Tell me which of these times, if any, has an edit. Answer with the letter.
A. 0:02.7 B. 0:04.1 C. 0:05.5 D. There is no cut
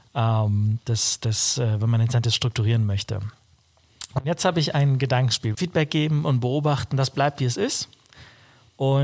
C